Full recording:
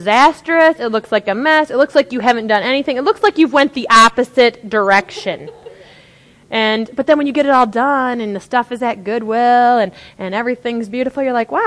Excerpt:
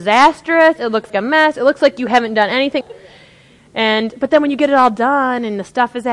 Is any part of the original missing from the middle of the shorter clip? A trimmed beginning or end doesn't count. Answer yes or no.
yes